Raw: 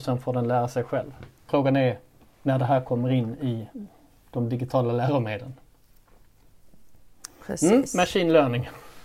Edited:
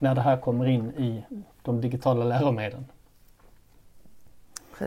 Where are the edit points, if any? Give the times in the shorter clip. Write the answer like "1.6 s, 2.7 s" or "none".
1.5 s